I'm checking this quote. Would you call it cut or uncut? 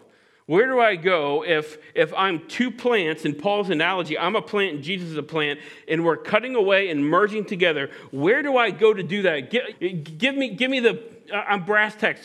cut